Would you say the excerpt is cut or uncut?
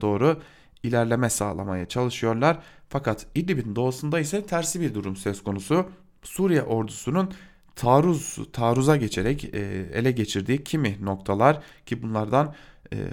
uncut